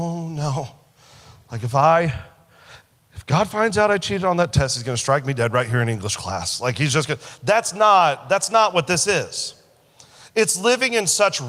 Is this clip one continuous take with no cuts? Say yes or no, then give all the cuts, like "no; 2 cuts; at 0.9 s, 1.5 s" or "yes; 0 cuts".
yes; 0 cuts